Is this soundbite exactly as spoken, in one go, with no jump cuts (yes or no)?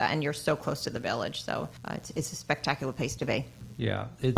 no